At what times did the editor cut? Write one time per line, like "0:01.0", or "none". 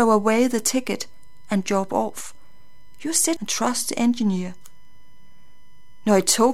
0:03.4